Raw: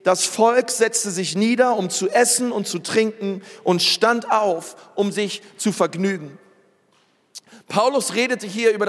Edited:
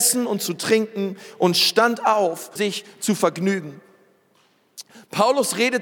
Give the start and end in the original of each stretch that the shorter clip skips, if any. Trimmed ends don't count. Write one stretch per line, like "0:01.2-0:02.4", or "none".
0:04.8-0:05.1